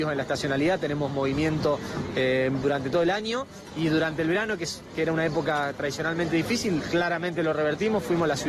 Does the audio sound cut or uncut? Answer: uncut